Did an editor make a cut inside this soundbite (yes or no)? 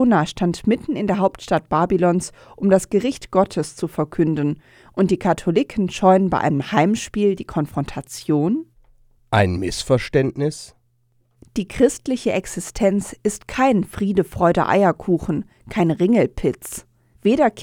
no